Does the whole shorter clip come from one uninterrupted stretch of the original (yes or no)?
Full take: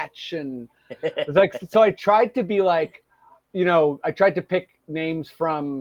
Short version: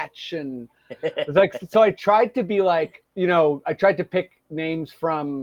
no